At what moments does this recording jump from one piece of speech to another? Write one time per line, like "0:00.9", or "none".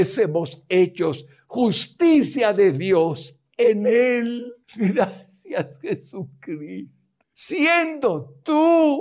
0:04.6